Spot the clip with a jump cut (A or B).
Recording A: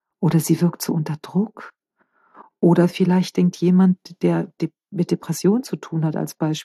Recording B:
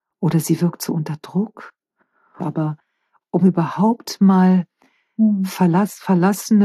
B